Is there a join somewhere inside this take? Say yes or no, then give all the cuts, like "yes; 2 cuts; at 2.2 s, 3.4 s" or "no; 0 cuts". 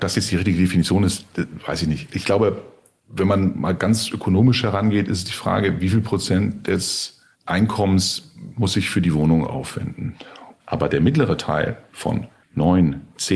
yes; 2 cuts; at 7.3 s, 10.6 s